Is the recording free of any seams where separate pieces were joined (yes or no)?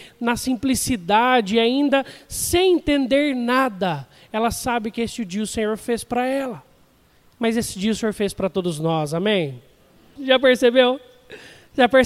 no